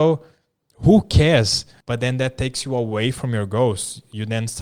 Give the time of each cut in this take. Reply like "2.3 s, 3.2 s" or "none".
1.8 s